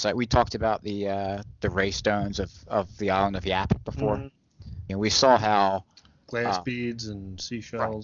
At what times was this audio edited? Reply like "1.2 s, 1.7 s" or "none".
4.9 s